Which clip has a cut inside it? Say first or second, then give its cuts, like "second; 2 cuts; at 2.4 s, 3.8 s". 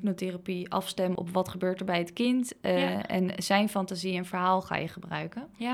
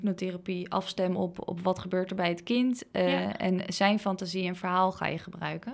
first; 1 cut; at 1.2 s